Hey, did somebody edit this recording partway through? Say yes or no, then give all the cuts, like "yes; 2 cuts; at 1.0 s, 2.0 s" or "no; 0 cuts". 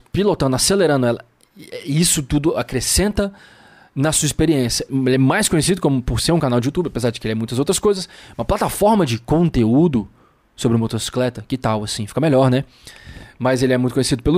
yes; 1 cut; at 4.9 s